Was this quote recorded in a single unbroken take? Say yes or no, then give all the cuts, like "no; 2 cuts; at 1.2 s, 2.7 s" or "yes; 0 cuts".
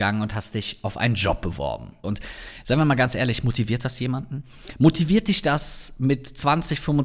no; 1 cut; at 2.0 s